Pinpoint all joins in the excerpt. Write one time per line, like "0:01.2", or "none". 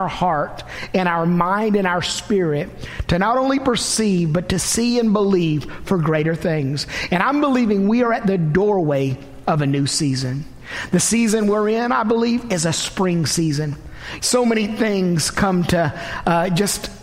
0:14.2